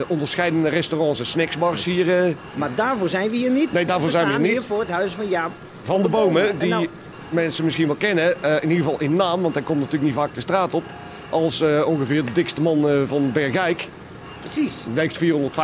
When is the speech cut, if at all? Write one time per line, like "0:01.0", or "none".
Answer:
none